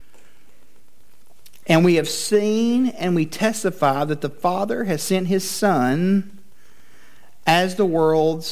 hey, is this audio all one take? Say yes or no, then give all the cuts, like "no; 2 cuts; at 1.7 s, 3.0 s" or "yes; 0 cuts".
no; 1 cut; at 1.6 s